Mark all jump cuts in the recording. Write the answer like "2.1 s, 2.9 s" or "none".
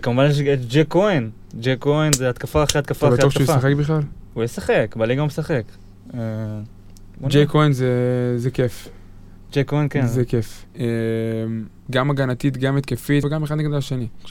10.6 s, 11.9 s, 13.2 s